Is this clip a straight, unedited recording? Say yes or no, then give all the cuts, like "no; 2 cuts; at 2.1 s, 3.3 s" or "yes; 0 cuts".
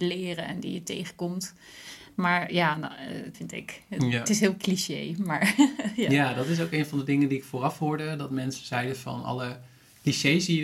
no; 1 cut; at 3.3 s